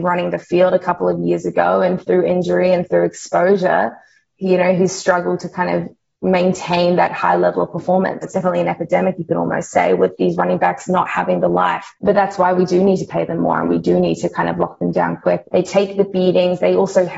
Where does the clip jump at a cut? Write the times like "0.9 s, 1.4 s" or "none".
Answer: 8.2 s, 11.9 s, 15.4 s